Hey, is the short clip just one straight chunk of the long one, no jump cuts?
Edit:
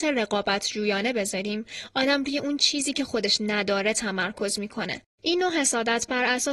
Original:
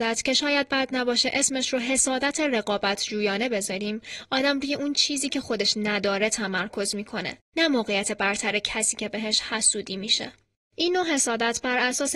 no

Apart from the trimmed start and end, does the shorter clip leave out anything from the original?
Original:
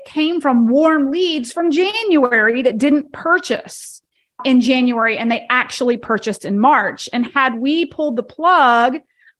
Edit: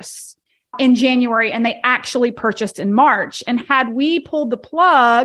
no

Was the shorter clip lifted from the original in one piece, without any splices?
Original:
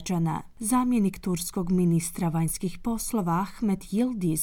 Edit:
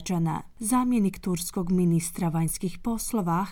yes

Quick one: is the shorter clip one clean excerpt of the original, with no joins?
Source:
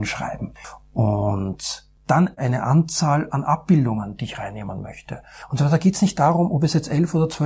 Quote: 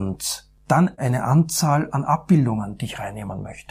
yes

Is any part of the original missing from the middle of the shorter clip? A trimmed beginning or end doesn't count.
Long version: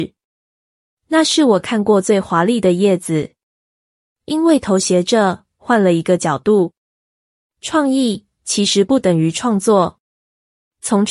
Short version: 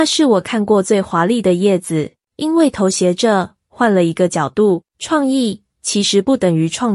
yes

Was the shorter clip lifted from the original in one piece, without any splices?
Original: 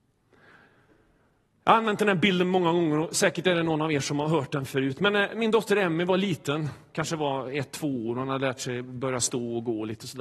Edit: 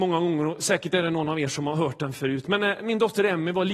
yes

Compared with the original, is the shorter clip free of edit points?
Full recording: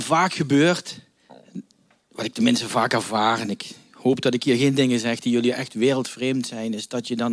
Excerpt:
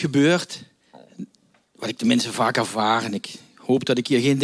yes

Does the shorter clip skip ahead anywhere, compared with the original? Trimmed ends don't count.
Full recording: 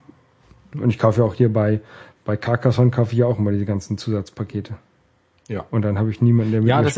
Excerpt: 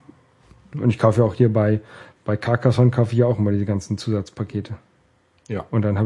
no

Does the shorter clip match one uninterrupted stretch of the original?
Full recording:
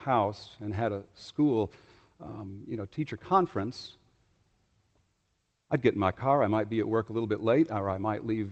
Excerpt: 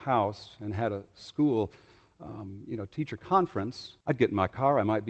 no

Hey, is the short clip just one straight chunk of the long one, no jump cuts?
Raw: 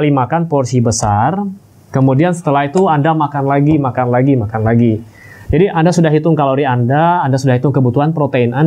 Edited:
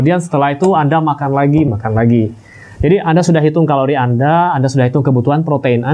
no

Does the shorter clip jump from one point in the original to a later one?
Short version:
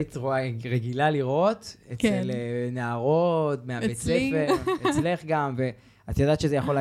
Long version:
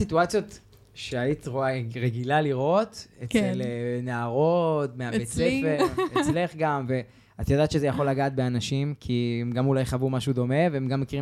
no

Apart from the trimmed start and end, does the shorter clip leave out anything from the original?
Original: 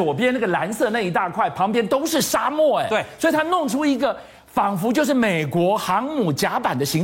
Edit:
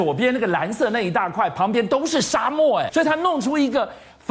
yes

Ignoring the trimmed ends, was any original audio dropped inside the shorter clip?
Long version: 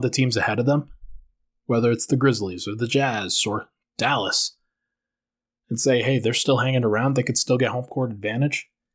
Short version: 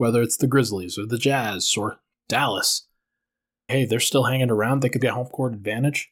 yes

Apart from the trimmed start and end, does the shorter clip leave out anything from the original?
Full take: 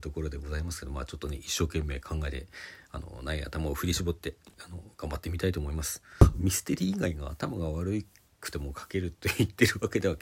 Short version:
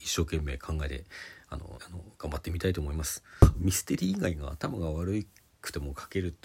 yes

